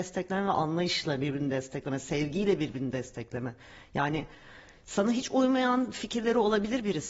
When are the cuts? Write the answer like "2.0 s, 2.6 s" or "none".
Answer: none